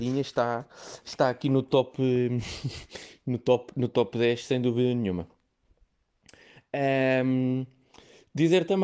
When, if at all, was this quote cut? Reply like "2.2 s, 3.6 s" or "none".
none